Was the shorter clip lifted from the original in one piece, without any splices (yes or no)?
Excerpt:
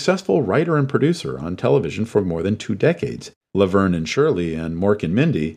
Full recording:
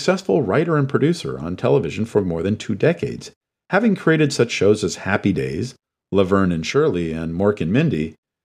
no